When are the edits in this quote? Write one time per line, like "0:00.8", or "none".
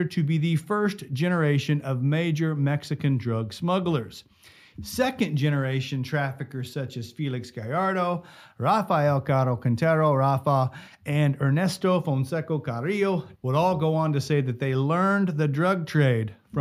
0:04.7
0:13.3